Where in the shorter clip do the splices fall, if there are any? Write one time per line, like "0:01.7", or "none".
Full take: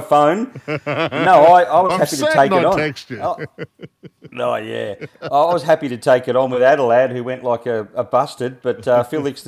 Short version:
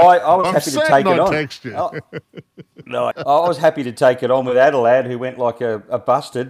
0:03.1